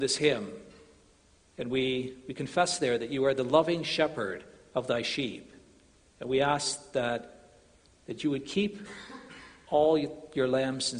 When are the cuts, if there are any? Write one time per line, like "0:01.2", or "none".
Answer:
none